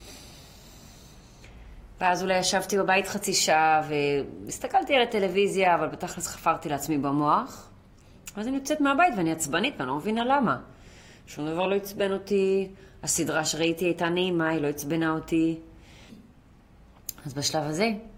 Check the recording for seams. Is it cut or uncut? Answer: cut